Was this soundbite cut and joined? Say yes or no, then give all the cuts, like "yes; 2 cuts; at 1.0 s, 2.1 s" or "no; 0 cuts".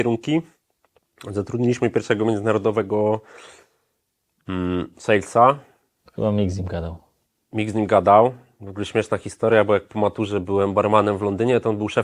no; 0 cuts